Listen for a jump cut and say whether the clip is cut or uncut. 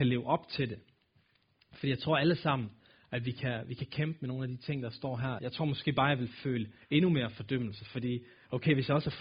cut